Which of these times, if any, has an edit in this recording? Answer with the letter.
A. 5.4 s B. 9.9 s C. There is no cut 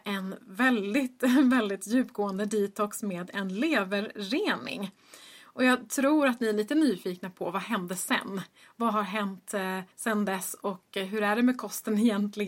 B